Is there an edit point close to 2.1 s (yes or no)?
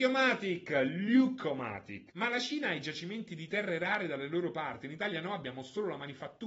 yes